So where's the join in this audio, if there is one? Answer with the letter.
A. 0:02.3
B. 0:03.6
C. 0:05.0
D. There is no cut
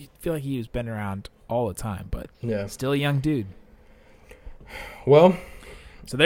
A